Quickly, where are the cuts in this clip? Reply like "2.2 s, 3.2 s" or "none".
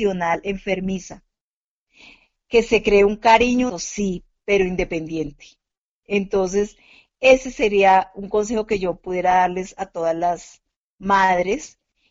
3.7 s